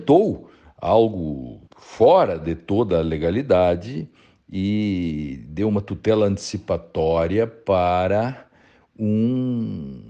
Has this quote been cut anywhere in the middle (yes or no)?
yes